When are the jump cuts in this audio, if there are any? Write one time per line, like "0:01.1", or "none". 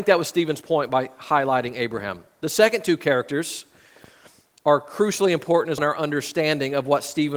0:05.8